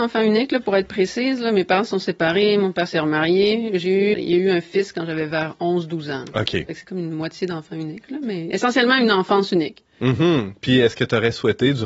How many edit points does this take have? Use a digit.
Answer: 1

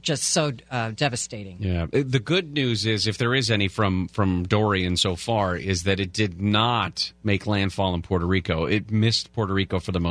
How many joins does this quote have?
0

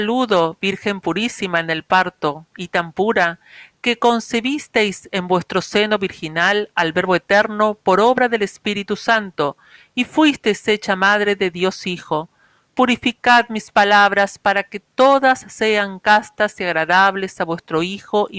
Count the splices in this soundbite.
0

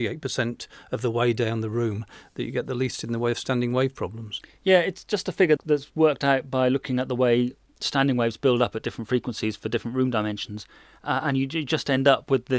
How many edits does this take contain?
1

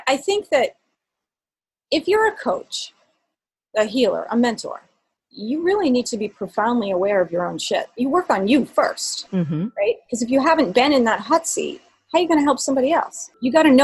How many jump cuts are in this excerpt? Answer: 1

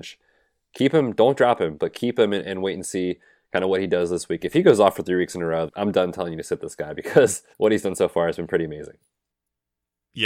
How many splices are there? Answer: 2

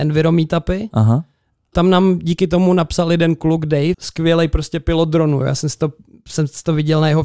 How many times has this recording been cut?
2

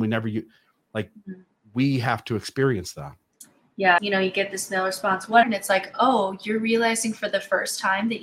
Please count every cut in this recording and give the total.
2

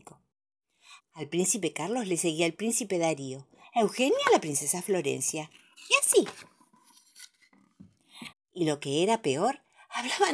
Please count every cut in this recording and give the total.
3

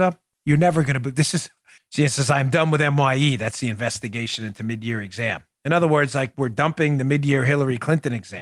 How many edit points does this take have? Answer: 1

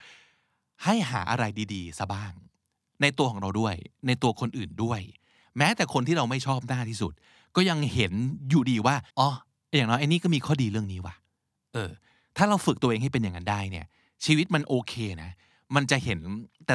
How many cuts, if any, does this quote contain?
1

